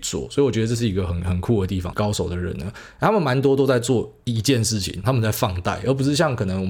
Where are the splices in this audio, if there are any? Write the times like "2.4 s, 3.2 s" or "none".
1.9 s, 5.0 s